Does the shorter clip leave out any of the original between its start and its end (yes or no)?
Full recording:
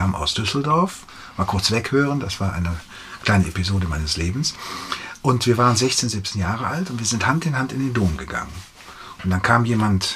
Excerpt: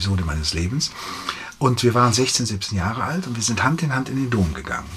no